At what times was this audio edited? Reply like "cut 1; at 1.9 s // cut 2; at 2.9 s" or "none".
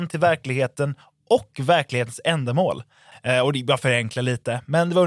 cut 1; at 3.1 s